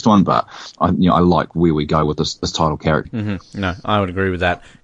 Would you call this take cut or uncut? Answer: cut